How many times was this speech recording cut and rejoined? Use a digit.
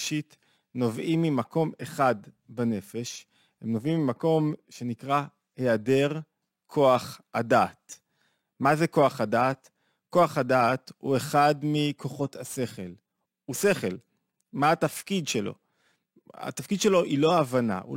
0